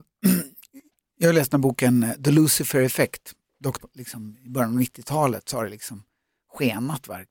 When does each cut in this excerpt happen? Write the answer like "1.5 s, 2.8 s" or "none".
3.8 s